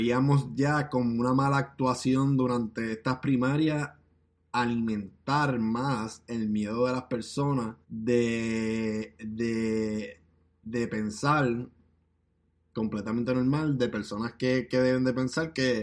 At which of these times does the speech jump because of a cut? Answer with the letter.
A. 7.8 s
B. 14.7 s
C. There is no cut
A